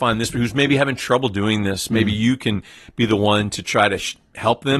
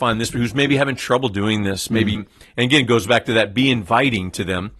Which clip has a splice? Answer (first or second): second